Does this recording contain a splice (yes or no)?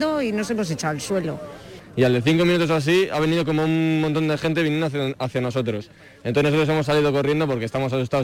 no